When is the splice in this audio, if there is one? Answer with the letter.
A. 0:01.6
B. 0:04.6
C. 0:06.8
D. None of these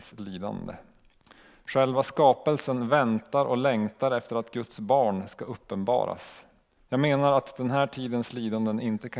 C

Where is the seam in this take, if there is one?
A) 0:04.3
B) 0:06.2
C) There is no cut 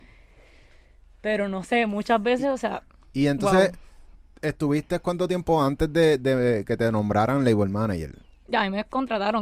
C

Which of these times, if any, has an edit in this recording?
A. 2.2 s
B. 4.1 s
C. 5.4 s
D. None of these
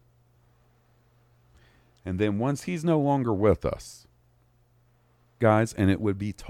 C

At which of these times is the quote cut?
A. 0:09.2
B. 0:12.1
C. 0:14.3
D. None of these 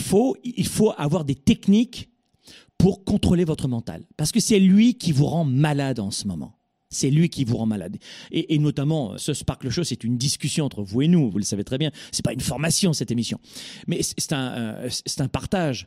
A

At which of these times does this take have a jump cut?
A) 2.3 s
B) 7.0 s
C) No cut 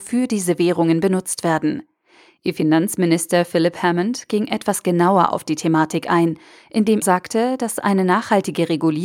B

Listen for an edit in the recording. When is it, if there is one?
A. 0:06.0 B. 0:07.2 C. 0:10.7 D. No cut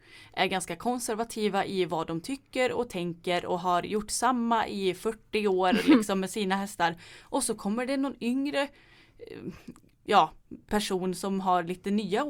D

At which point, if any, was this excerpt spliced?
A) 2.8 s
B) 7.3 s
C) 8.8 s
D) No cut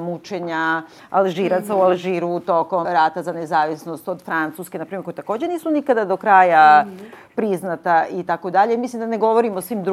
A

